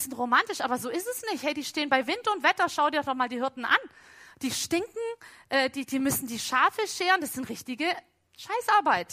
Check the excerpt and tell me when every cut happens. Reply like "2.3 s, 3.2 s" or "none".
none

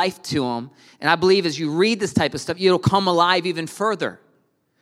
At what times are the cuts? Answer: none

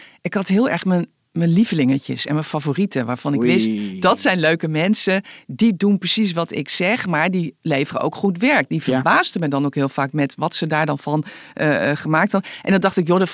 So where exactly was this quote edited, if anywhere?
none

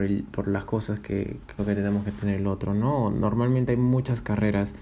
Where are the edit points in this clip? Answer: 1.6 s

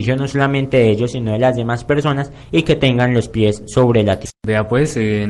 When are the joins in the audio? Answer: none

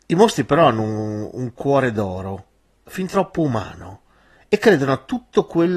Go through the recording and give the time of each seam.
none

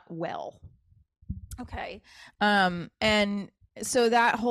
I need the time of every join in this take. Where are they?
none

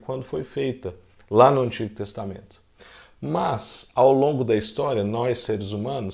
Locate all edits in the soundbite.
none

